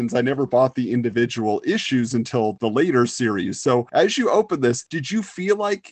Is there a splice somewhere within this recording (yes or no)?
no